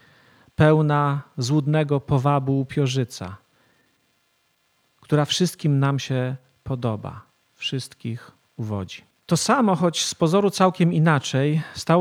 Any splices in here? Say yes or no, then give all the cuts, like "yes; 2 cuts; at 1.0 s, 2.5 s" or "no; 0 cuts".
no; 0 cuts